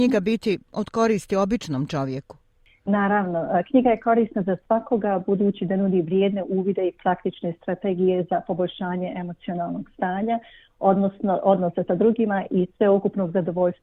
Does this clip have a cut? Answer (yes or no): no